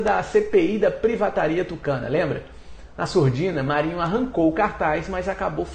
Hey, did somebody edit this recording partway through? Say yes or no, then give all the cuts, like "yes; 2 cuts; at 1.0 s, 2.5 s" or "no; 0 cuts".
no; 0 cuts